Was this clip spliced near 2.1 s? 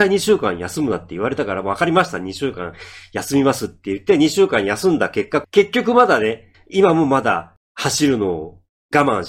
no; 2 cuts; at 5.4 s, 6.5 s

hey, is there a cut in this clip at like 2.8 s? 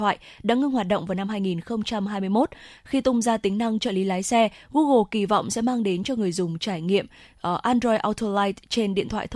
yes; 1 cut; at 2.8 s

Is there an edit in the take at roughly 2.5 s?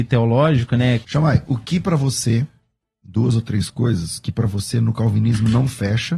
no; 1 cut; at 1.0 s

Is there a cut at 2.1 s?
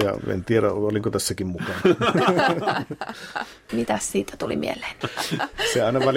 no; 2 cuts; at 3.7 s, 5.0 s

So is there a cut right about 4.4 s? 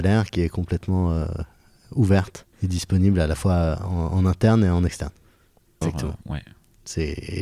no; 2 cuts; at 2.5 s, 5.8 s

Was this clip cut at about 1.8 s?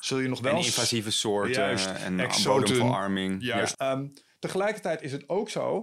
no; 1 cut; at 3.7 s

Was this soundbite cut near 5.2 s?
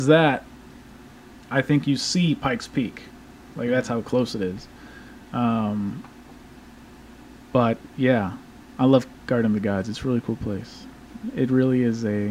no; 0 cuts

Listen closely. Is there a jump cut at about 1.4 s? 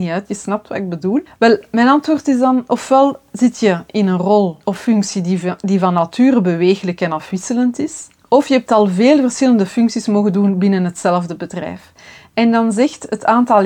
no; 0 cuts

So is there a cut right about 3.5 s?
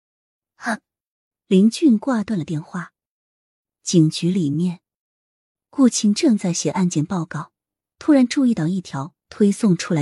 no; 0 cuts

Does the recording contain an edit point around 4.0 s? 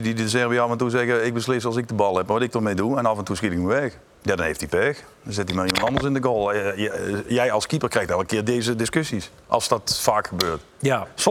yes; 1 cut; at 4.0 s

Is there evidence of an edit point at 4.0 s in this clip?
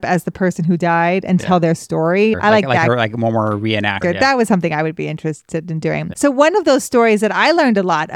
yes; 2 cuts; at 4.0 s, 6.1 s

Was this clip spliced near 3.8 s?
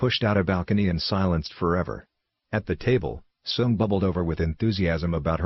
no; 1 cut; at 2.4 s

